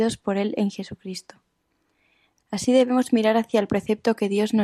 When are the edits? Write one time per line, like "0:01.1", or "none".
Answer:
0:02.4